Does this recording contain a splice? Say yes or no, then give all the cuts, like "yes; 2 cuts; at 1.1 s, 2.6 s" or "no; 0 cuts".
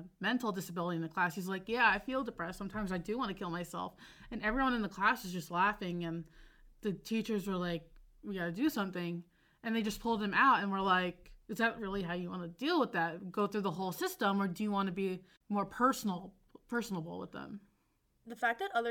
no; 0 cuts